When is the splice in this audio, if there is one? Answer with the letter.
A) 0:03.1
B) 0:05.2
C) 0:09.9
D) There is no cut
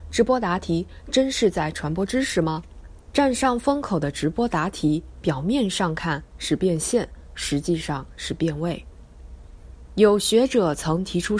A